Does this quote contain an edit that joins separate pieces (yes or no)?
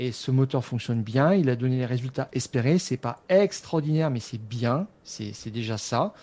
no